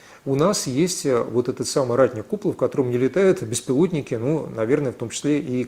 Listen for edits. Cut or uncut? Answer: uncut